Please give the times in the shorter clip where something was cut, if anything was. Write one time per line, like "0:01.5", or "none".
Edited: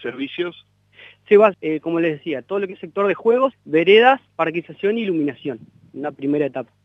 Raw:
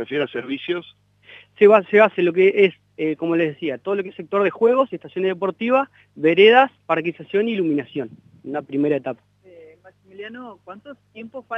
0:01.5
0:03.5